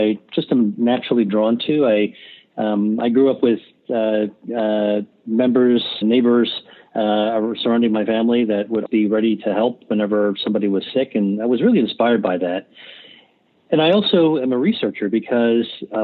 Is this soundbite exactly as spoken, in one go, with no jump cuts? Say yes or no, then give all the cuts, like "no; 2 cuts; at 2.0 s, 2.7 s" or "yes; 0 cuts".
no; 2 cuts; at 6.0 s, 8.9 s